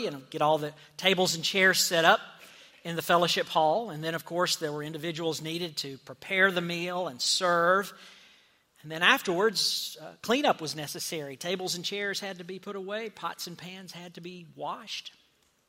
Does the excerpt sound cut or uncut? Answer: uncut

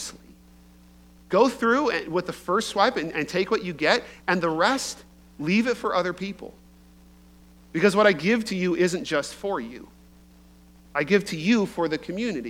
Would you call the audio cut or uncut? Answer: uncut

